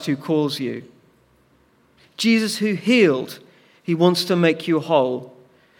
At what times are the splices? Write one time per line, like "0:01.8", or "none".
0:02.0